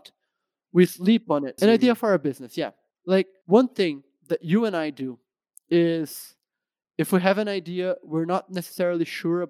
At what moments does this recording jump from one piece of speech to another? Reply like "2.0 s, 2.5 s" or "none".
1.6 s, 2.9 s